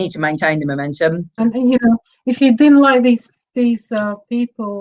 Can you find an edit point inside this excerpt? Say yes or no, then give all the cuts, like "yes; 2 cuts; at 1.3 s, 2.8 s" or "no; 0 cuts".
yes; 1 cut; at 1.4 s